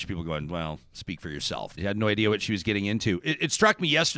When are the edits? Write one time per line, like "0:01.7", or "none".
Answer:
0:01.8